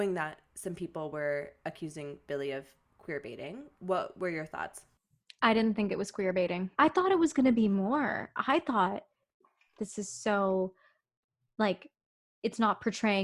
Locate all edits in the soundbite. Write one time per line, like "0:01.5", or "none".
0:06.7
0:09.8